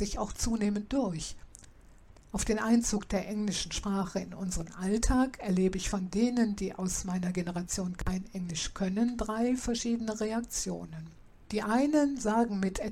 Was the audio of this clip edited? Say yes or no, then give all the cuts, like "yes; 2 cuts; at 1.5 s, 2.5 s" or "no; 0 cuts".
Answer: yes; 1 cut; at 2.1 s